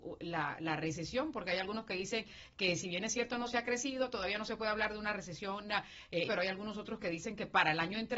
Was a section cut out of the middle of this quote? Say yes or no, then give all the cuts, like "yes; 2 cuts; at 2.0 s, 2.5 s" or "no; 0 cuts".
yes; 1 cut; at 6.3 s